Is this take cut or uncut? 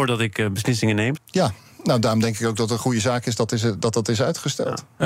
cut